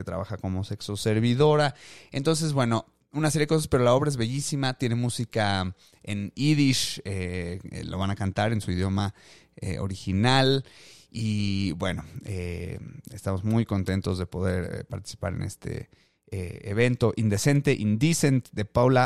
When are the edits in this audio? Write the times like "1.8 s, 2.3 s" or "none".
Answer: none